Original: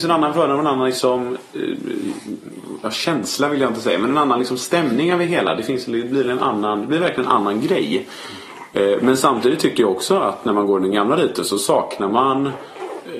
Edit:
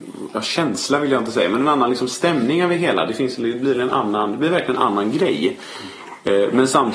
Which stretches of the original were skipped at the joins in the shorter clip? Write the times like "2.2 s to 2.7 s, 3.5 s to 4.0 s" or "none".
none